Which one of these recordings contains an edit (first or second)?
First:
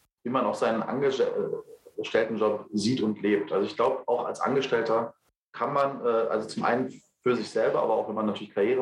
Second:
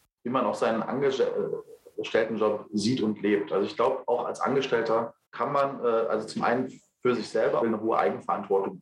second